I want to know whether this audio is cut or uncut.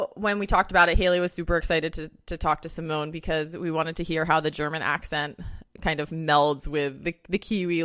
uncut